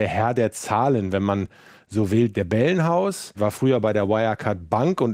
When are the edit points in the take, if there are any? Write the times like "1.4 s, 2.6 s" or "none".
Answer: 2.3 s